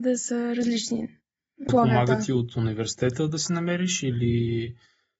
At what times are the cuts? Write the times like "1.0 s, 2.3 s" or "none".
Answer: 1.7 s